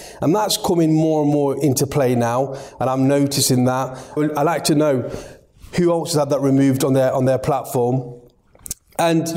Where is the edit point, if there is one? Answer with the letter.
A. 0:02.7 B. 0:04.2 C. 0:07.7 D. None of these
B